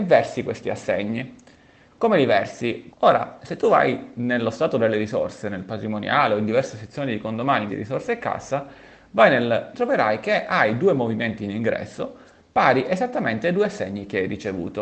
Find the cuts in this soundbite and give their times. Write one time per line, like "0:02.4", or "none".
0:02.9
0:07.7
0:09.7